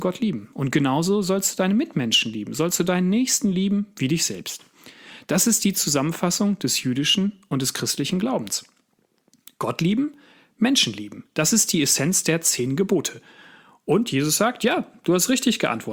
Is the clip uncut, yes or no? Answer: yes